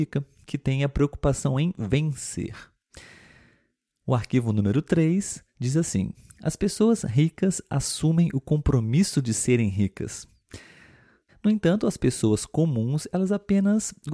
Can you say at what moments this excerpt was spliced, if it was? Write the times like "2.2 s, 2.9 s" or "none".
11.3 s